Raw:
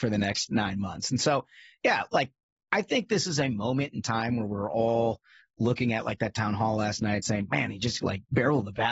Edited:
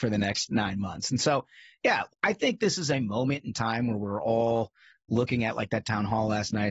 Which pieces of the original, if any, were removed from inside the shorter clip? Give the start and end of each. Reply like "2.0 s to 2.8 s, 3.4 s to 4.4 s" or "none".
2.1 s to 2.6 s